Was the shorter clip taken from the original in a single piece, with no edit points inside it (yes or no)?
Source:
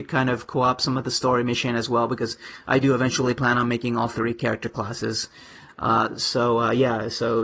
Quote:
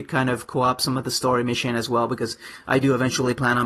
yes